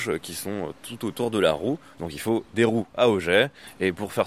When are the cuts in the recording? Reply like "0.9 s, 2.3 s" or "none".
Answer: 2.0 s